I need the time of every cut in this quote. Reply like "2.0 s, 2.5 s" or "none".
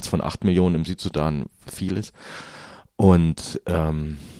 none